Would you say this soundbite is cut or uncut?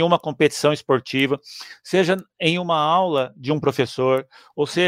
uncut